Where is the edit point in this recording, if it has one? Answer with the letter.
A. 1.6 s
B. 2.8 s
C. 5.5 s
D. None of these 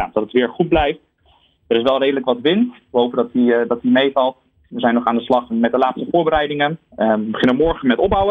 C